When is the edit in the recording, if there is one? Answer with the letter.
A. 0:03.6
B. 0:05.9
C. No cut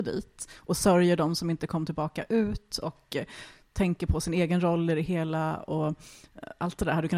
C